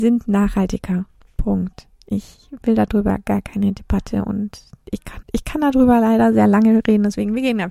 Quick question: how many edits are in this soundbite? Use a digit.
1